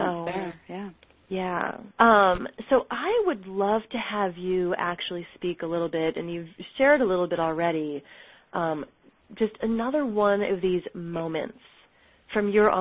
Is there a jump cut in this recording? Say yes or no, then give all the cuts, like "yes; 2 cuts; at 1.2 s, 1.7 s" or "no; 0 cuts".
yes; 1 cut; at 1.9 s